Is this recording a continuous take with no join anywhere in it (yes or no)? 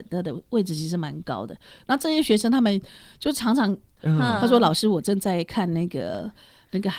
no